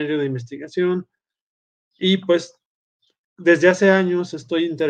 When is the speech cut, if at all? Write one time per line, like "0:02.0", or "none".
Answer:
0:01.8